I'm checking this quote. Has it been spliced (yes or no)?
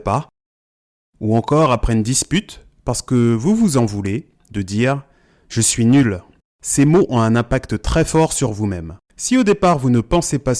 yes